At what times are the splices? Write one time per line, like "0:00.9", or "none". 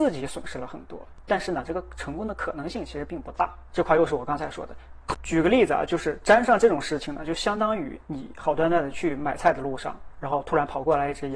0:01.2
0:03.7
0:05.1